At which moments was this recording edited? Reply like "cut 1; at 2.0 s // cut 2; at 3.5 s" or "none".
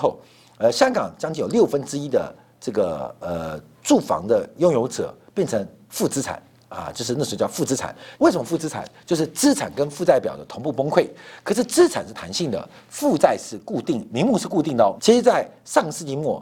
cut 1; at 8.1 s // cut 2; at 15.0 s